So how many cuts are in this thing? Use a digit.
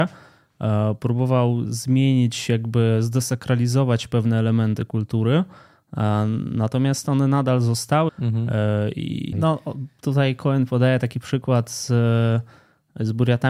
2